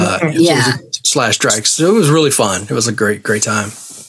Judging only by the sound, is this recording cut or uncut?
uncut